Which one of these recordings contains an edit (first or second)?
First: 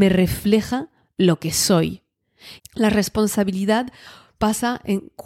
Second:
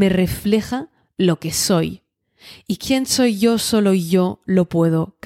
first